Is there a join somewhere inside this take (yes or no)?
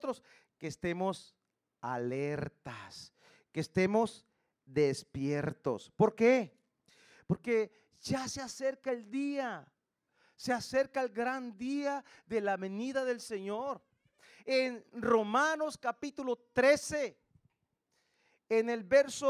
no